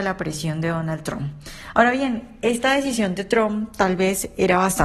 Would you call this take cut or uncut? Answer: uncut